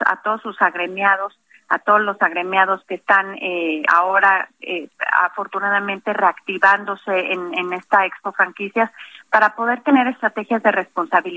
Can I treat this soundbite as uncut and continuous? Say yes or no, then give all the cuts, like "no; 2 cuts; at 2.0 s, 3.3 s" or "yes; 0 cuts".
yes; 0 cuts